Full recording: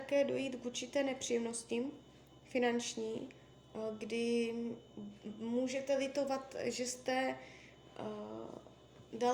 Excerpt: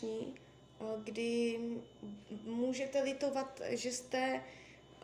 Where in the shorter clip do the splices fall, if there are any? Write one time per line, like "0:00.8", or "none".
none